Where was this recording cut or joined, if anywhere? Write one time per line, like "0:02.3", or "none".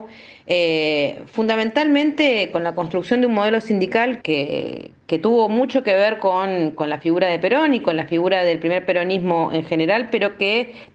0:04.2